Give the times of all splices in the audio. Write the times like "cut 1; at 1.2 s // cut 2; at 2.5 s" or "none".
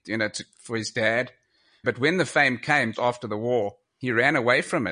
cut 1; at 1.8 s // cut 2; at 2.9 s